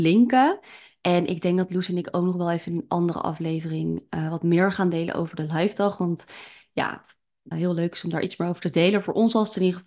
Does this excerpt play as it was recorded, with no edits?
no; 1 cut; at 7.5 s

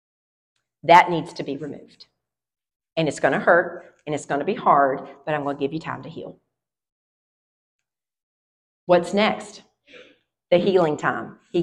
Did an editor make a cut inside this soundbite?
no; 0 cuts

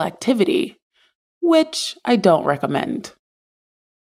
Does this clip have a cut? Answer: no; 0 cuts

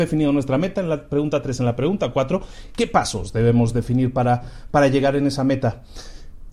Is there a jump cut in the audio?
no; 0 cuts

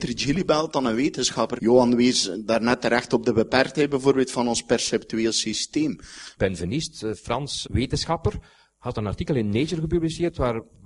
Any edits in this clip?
yes; 3 cuts; at 1.6 s, 6.4 s, 7.6 s

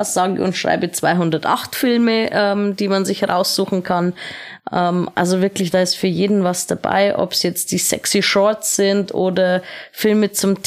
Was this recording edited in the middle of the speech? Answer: no; 0 cuts

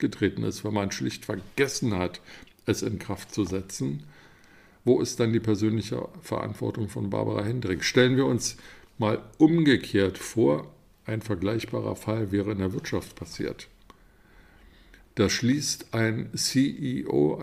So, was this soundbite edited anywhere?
no; 0 cuts

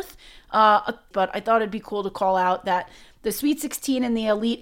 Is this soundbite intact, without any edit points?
no; 1 cut; at 1.1 s

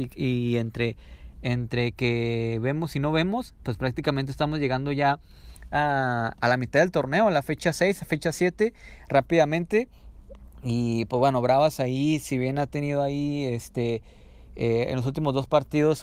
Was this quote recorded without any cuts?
yes; 0 cuts

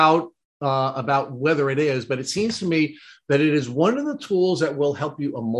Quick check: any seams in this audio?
no; 0 cuts

